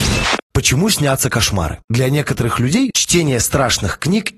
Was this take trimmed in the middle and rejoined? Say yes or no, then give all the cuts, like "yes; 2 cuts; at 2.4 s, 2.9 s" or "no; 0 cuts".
yes; 2 cuts; at 1.8 s, 2.9 s